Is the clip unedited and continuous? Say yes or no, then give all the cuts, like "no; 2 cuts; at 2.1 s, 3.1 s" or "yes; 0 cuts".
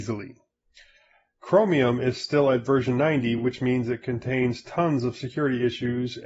yes; 0 cuts